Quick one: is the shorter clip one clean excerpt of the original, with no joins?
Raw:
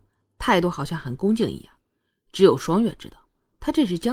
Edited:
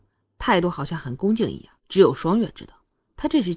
no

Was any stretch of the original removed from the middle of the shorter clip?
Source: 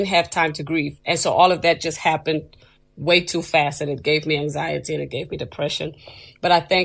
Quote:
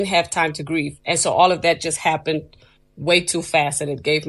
no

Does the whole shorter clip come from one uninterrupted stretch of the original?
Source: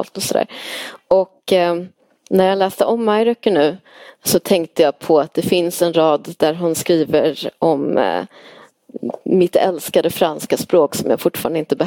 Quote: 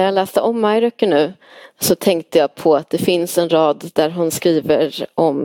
yes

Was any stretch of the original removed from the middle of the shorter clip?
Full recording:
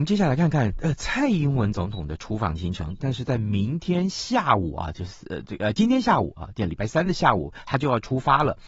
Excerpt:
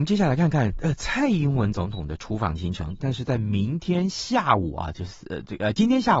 no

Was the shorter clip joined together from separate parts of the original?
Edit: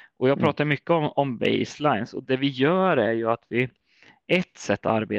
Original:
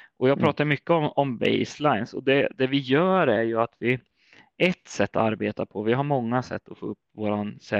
yes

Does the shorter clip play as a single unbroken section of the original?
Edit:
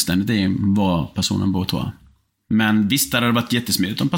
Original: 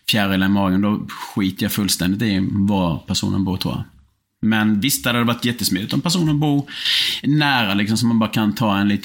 yes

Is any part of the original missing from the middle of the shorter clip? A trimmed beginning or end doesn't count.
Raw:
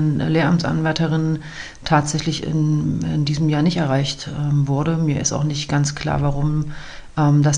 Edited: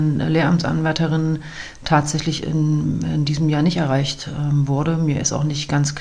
no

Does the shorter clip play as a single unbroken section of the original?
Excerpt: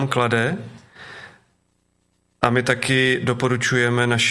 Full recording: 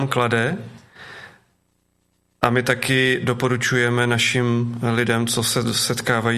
yes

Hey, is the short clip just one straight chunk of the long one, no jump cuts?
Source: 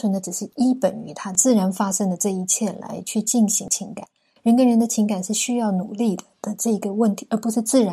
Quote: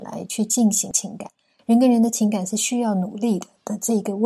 yes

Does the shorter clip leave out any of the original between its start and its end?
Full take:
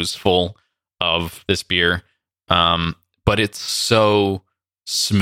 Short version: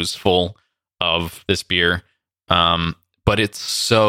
no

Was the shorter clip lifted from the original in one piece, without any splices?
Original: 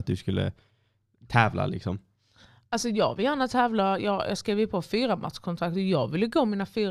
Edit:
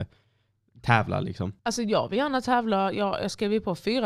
no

